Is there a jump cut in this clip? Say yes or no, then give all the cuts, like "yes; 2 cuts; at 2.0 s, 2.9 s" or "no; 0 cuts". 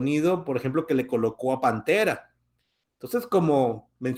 yes; 1 cut; at 2.8 s